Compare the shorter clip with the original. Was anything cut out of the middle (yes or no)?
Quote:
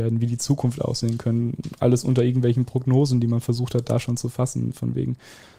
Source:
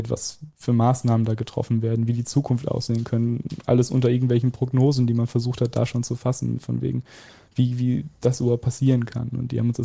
no